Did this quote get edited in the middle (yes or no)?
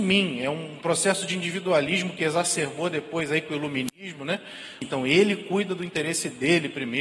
yes